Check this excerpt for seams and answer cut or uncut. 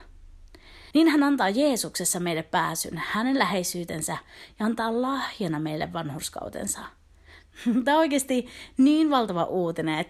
cut